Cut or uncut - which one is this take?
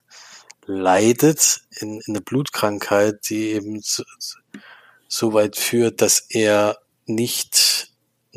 uncut